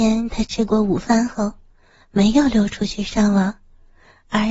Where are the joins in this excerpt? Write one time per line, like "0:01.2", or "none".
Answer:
none